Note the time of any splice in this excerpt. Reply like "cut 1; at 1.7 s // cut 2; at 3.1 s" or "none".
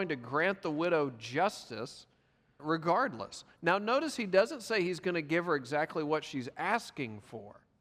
cut 1; at 2.6 s